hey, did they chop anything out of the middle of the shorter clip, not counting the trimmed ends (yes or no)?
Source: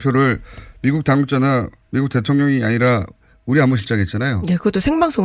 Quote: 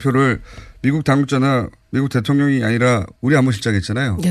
yes